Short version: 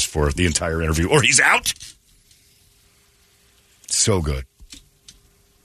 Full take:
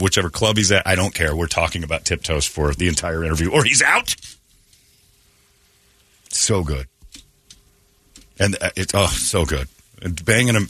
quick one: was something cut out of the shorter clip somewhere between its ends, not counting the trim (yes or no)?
no